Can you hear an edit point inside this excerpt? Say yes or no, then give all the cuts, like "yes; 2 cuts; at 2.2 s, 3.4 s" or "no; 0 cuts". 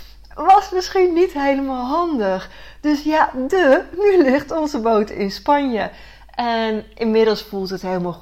no; 0 cuts